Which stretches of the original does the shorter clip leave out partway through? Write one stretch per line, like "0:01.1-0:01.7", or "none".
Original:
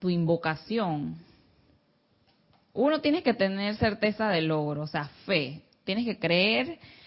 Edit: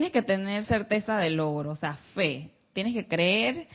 none